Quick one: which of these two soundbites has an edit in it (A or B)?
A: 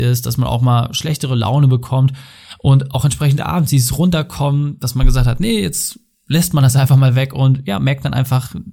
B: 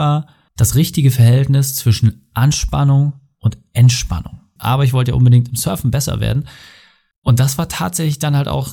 B